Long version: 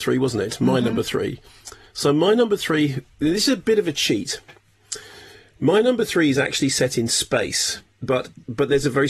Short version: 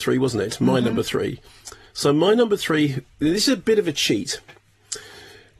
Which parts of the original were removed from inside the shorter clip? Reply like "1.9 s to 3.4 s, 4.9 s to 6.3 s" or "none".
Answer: none